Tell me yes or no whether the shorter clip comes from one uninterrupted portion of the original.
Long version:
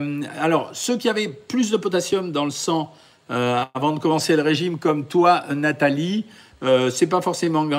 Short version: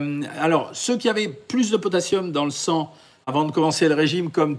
no